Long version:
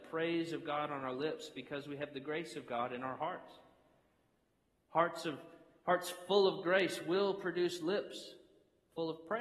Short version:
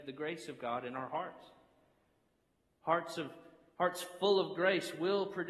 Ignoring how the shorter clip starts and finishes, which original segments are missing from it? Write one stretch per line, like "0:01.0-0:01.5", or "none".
none